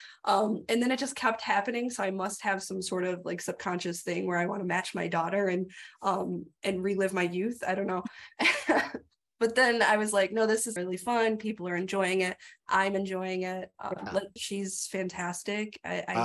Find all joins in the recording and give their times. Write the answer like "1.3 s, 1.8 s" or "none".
10.8 s, 14.4 s